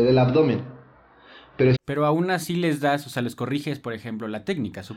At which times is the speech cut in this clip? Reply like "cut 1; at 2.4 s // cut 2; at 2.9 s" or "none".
cut 1; at 1.7 s